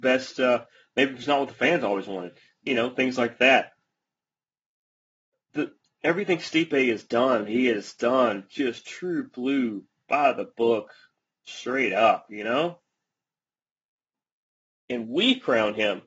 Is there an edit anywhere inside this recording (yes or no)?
no